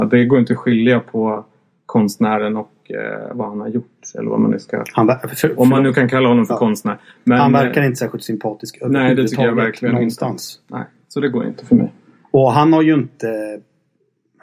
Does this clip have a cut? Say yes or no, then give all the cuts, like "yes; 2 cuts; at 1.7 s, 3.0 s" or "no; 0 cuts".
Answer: no; 0 cuts